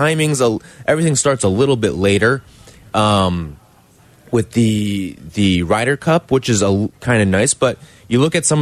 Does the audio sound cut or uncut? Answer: uncut